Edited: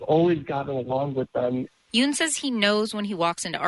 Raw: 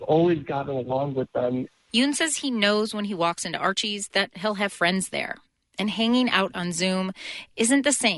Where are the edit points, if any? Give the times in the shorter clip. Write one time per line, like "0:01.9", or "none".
none